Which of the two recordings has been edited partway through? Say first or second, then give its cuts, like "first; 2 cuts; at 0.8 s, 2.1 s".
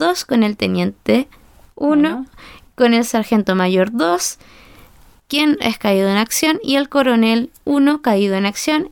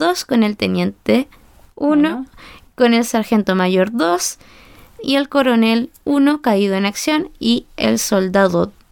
second; 1 cut; at 5.0 s